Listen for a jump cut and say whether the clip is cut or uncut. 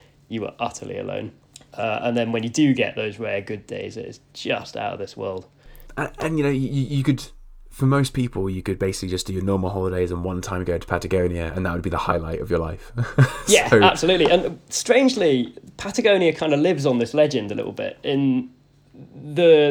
uncut